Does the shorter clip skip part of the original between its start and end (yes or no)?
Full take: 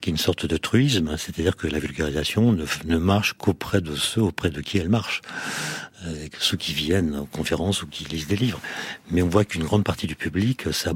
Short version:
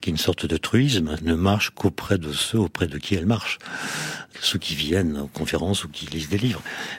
yes